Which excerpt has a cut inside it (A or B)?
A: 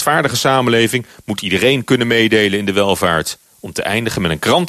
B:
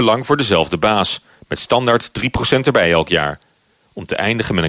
A